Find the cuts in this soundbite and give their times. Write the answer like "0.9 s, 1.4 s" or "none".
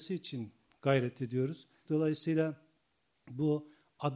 1.9 s

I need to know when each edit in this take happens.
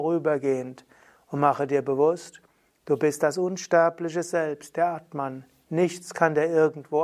none

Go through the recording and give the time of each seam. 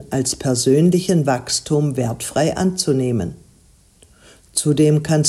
none

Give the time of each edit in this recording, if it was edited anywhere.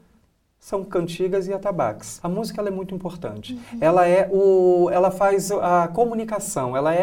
2.2 s

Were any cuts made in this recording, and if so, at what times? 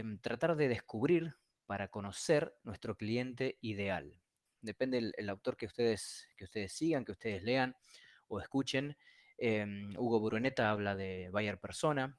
4.5 s

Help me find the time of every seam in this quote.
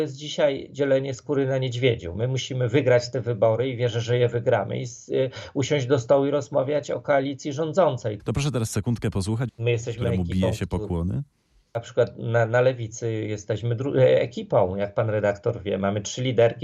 8.2 s, 9.5 s

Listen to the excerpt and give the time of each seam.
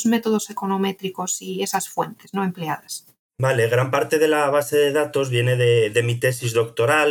none

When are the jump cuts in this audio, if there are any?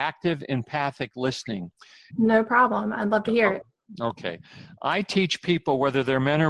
2.1 s

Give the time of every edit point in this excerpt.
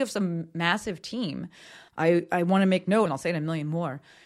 1.9 s, 3.1 s

